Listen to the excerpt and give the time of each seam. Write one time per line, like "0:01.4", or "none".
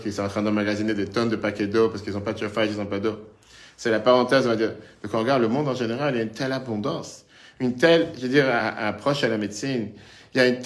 0:08.6